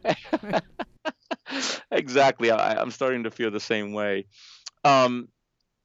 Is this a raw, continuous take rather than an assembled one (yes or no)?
yes